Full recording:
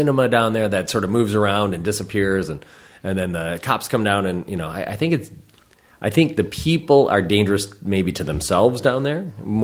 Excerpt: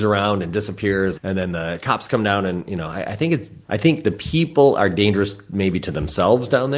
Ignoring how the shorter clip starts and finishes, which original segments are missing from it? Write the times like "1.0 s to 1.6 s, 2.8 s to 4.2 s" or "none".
2.5 s to 2.9 s, 5.4 s to 6.0 s